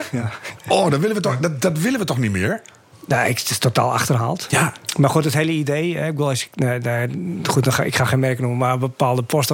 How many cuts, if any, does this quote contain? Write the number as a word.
zero